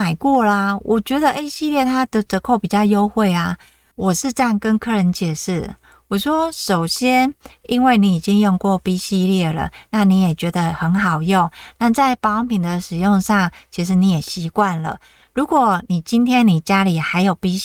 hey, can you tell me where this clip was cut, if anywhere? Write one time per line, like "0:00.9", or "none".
none